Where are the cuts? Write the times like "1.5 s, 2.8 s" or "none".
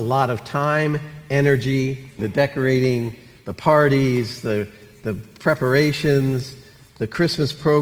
2.2 s